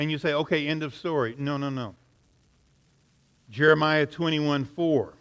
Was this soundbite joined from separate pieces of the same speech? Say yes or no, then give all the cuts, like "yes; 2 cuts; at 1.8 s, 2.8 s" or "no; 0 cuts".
yes; 1 cut; at 3.4 s